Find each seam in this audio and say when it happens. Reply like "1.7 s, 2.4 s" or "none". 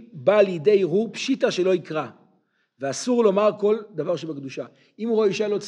none